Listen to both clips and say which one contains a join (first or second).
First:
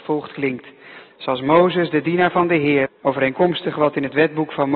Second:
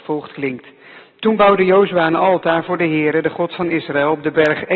first